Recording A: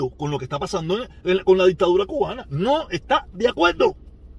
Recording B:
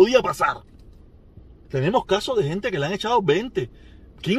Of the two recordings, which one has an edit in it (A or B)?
B